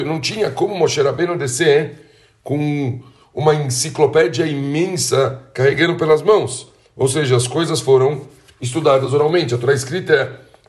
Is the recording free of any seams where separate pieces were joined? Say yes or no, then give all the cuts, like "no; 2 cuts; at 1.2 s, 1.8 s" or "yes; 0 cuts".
yes; 0 cuts